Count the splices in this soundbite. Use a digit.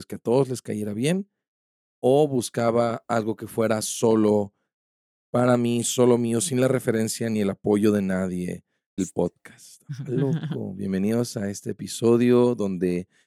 1